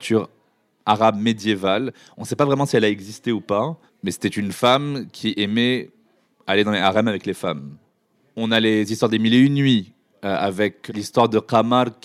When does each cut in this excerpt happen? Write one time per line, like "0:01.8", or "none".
none